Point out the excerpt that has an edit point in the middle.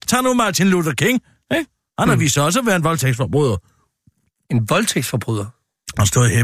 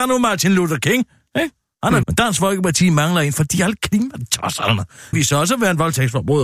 second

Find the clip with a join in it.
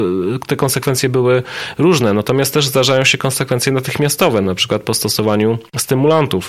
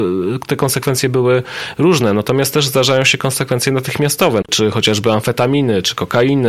second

